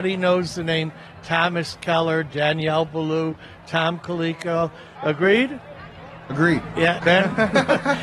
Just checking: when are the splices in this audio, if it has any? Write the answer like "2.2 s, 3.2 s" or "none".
4.9 s, 7.0 s